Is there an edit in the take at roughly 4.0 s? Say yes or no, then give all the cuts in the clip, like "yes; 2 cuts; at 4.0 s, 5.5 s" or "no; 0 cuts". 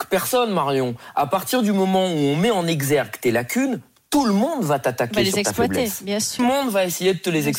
no; 1 cut; at 6.4 s